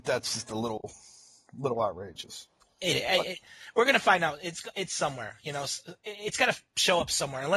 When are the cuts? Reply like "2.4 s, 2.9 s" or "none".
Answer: none